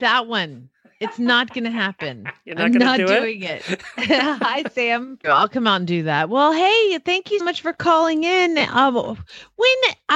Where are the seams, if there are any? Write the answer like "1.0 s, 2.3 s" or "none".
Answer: 5.2 s, 7.4 s